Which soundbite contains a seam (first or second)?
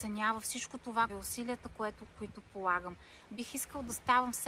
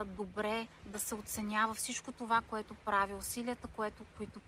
first